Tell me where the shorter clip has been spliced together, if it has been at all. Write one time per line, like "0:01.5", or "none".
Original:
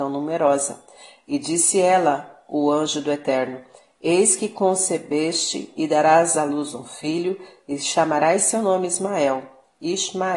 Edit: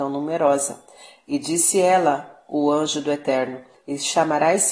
0:03.7